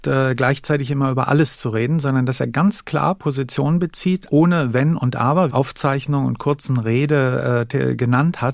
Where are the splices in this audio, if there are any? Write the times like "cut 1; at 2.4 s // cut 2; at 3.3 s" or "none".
cut 1; at 4.3 s // cut 2; at 5.5 s